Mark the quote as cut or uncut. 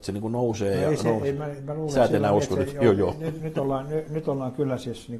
uncut